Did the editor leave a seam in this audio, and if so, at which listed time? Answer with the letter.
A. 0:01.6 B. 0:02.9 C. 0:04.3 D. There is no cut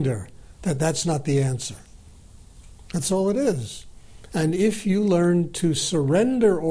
D